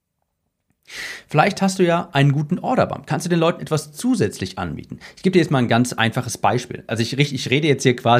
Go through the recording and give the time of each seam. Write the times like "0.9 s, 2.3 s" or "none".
none